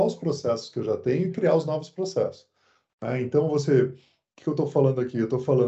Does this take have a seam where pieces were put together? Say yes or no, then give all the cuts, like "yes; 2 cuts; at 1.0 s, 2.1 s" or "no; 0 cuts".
no; 0 cuts